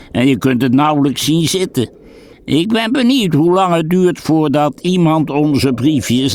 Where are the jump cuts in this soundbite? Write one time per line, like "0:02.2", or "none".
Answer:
0:02.3